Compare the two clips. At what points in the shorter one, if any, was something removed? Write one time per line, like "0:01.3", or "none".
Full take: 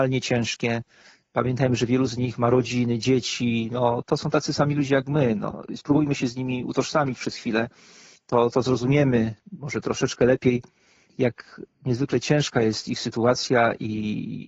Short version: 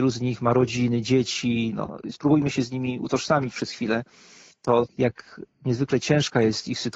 0:01.7
0:04.9